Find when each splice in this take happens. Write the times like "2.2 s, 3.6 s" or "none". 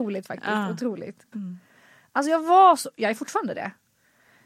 1.3 s